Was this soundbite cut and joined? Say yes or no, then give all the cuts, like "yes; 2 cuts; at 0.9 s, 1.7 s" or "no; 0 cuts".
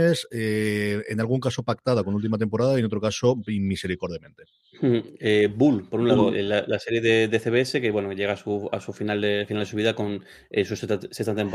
no; 0 cuts